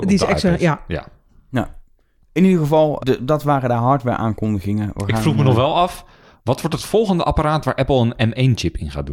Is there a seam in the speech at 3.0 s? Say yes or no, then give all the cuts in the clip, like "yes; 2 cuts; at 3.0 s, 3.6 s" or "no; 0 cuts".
yes; 1 cut; at 3.0 s